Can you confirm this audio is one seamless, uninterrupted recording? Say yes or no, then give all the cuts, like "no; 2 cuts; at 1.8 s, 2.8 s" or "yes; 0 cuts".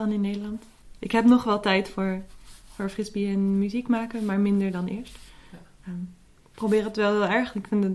yes; 0 cuts